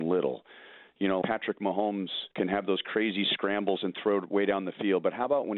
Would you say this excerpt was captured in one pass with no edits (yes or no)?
no